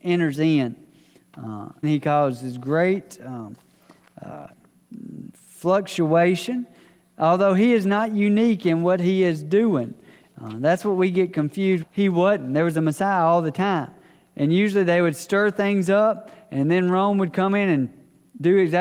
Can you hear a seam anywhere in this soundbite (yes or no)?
yes